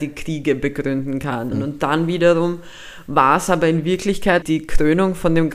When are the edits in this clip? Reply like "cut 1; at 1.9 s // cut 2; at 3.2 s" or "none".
cut 1; at 1.5 s // cut 2; at 4.4 s